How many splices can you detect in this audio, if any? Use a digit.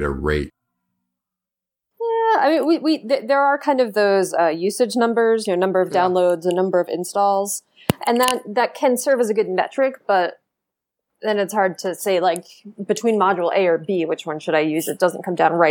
0